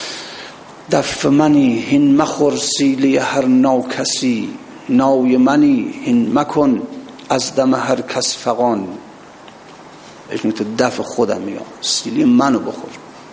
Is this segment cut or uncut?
cut